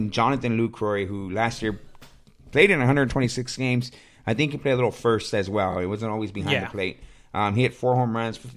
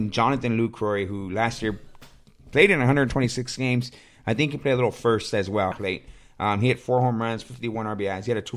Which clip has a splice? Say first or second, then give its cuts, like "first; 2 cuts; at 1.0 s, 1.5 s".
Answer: second; 1 cut; at 5.7 s